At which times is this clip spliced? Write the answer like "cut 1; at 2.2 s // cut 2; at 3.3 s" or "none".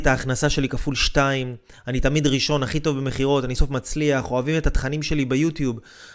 cut 1; at 3.6 s